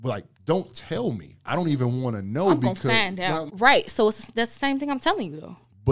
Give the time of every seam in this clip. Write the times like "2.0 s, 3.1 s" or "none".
3.5 s

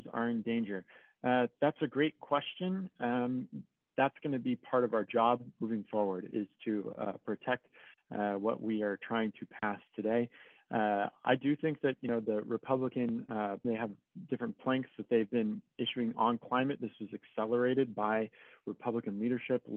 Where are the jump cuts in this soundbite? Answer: 13.6 s

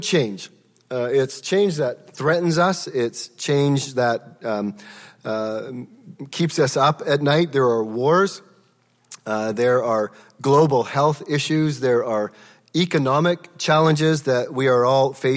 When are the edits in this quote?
none

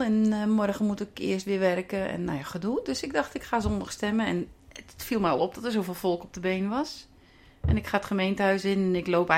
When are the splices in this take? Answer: none

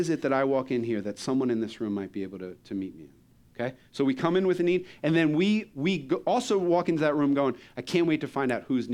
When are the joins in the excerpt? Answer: none

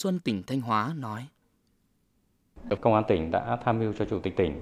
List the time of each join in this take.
2.8 s

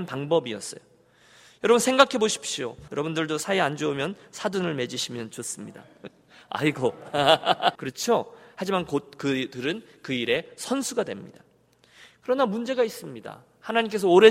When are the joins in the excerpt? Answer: 2.9 s, 7.8 s

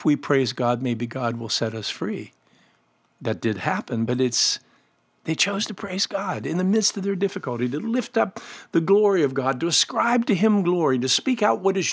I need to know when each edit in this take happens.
none

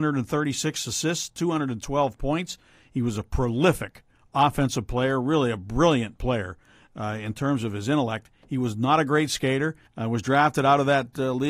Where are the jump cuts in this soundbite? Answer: 9.9 s

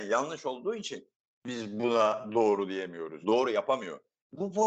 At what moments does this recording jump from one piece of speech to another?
3.2 s

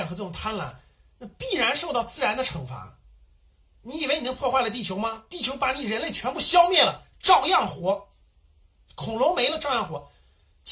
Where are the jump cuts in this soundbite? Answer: none

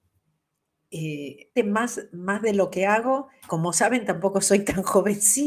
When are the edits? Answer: 1.6 s, 3.5 s

